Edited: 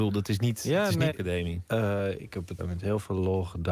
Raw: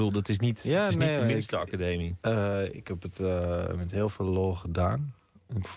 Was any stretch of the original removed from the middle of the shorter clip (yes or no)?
yes